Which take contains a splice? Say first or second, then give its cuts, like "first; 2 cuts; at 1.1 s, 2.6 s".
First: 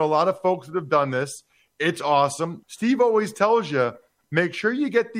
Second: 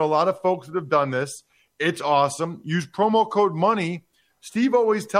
first; 1 cut; at 2.6 s